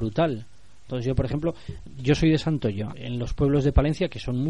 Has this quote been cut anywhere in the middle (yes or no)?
yes